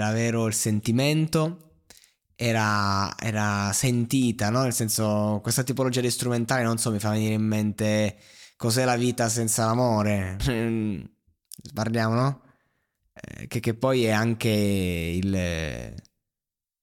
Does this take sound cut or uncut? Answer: cut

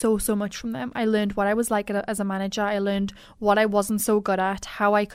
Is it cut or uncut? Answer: uncut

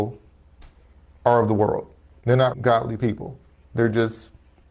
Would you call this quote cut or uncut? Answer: cut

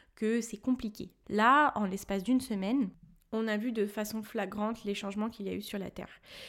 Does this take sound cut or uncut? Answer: cut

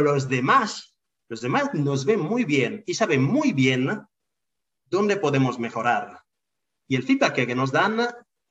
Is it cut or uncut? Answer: uncut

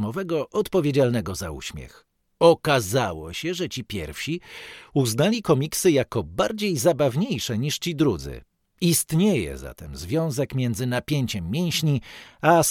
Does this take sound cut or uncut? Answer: uncut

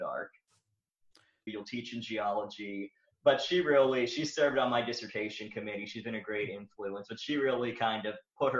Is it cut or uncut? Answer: cut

